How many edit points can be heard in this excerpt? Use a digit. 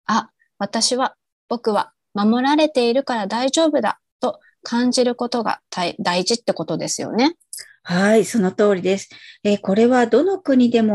0